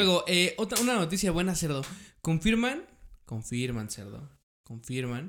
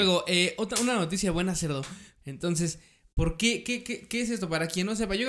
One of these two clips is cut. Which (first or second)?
second